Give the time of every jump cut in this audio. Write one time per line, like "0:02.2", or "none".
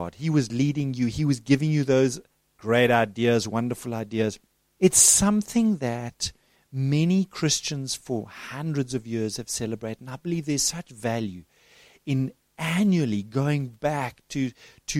0:04.8